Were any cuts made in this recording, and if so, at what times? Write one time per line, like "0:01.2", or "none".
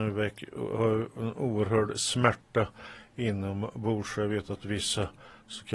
none